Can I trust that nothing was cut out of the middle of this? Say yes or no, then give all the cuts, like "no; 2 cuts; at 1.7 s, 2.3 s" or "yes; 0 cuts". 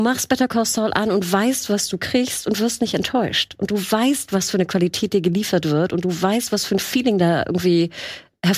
yes; 0 cuts